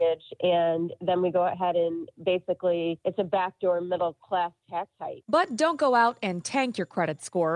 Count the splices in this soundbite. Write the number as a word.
zero